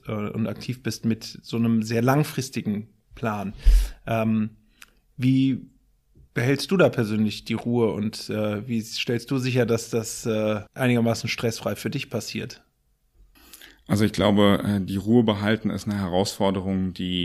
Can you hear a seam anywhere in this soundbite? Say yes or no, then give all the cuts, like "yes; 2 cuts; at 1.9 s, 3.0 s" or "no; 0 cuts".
yes; 1 cut; at 10.7 s